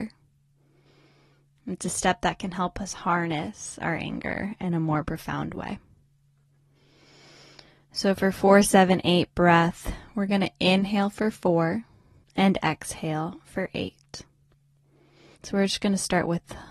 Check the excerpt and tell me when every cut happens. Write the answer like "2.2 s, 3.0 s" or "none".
12.2 s, 15.3 s